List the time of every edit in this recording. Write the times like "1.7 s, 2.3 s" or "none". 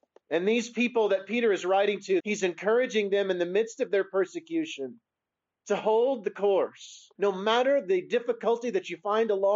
2.2 s, 7.2 s